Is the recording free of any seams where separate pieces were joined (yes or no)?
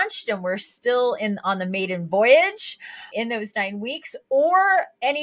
no